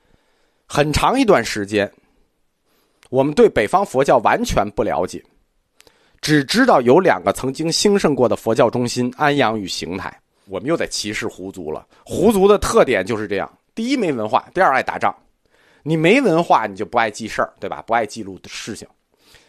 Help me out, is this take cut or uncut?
cut